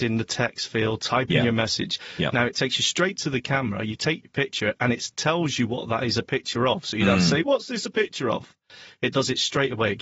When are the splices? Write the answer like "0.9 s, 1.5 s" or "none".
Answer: none